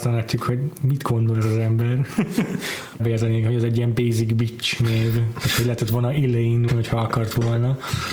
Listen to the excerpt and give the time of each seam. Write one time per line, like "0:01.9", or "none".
0:03.0
0:06.7